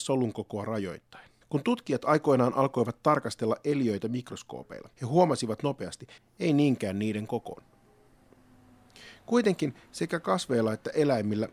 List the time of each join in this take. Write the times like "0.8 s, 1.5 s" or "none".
1.4 s, 4.9 s, 6.2 s